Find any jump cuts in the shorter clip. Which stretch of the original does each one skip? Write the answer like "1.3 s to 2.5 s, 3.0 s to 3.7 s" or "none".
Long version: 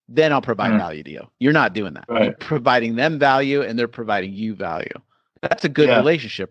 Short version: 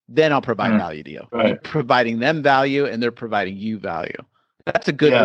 1.3 s to 2.1 s